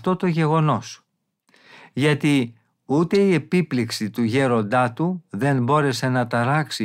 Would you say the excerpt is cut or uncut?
uncut